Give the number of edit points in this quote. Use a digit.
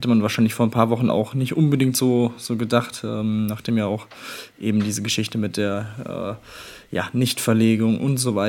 0